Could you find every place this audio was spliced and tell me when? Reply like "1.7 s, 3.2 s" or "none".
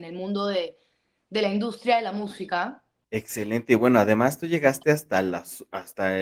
3.0 s